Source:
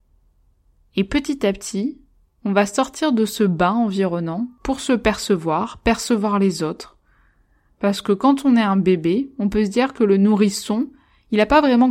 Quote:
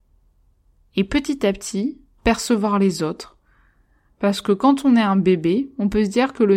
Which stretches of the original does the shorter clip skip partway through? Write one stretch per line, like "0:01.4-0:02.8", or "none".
0:02.2-0:05.8